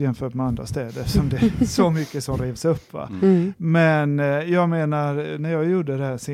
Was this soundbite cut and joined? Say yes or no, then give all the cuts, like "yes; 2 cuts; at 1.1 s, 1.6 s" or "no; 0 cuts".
no; 0 cuts